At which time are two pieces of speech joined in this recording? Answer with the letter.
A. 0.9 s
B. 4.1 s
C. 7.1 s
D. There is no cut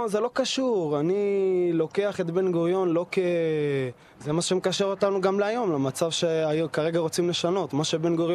B